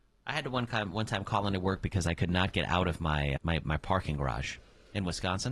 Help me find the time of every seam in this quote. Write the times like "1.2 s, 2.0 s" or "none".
3.4 s